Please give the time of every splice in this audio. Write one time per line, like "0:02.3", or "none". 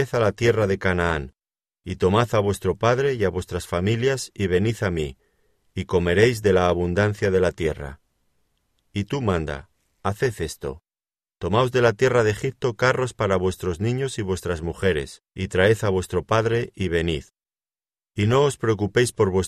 0:05.6
0:15.3